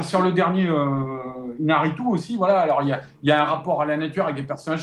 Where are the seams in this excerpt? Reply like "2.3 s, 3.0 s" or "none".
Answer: none